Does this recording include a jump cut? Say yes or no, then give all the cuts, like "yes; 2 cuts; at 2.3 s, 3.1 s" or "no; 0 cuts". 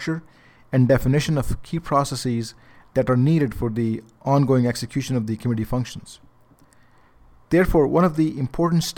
no; 0 cuts